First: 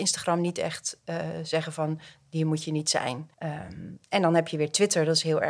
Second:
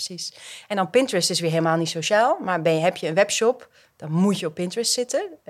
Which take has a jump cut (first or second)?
first